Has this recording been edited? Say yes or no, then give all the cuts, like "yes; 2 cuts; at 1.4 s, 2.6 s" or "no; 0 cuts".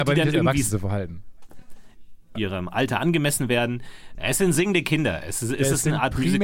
yes; 2 cuts; at 2.4 s, 4.2 s